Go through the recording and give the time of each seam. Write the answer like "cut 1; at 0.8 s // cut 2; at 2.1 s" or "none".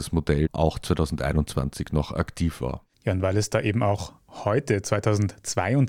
cut 1; at 2.9 s